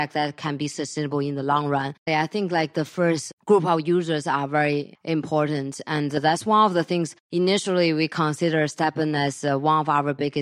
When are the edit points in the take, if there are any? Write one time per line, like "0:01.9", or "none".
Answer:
0:02.1